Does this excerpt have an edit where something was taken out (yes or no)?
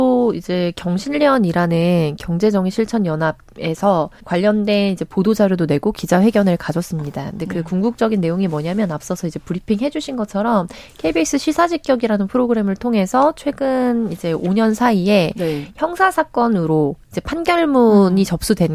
yes